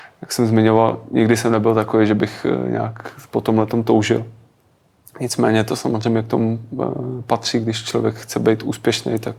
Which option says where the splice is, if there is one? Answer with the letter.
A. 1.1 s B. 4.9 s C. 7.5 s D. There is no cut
D